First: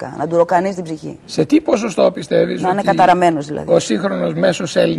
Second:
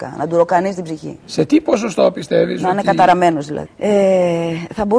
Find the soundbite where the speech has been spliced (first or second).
second